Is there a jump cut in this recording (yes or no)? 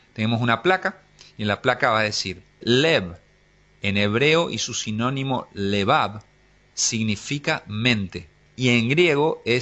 yes